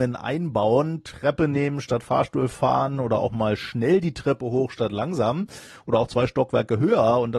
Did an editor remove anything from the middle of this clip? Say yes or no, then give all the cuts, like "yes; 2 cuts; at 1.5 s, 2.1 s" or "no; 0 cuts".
no; 0 cuts